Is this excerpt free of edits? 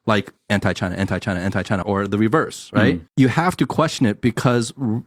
no; 2 cuts; at 1.8 s, 3.1 s

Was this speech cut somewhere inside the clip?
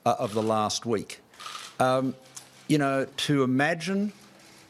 yes; 1 cut; at 3.1 s

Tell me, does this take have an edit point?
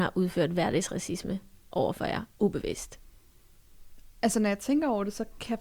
no; 0 cuts

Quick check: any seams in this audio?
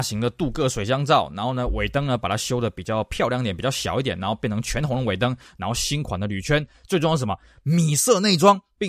no; 0 cuts

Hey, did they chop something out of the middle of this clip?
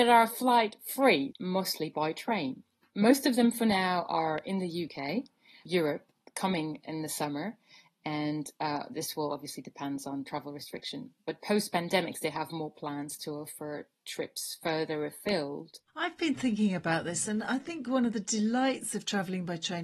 yes; 2 cuts; at 1.3 s, 5.7 s

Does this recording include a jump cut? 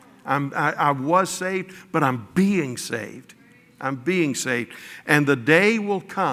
no; 0 cuts

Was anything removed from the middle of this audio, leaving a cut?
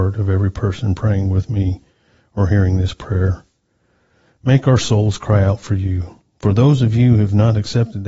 yes; 1 cut; at 6.2 s

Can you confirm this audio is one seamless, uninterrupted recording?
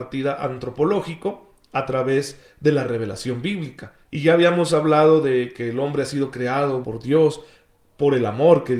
no; 2 cuts; at 4.0 s, 6.8 s

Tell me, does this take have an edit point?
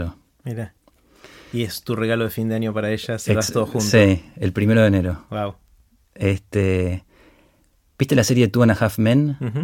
no; 0 cuts

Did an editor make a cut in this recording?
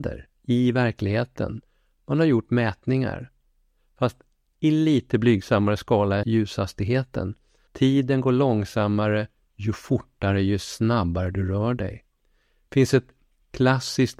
yes; 2 cuts; at 6.2 s, 7.7 s

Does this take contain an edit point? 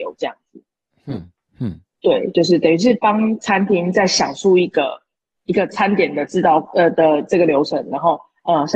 no; 0 cuts

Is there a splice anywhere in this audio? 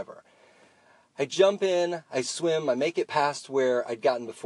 no; 0 cuts

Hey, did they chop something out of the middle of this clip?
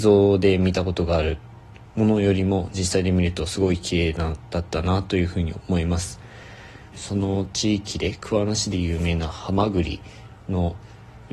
yes; 1 cut; at 6.9 s

